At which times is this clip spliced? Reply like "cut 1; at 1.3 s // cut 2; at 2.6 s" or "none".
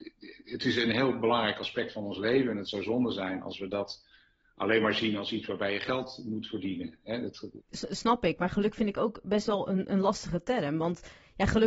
cut 1; at 7.6 s